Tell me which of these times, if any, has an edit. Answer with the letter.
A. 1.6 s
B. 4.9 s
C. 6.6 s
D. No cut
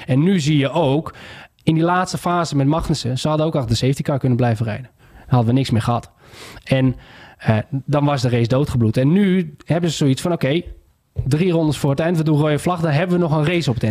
A